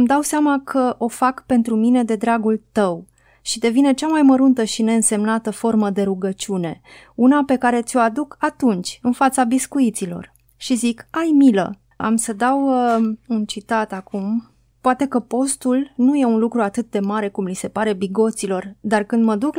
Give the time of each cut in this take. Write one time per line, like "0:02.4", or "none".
0:11.9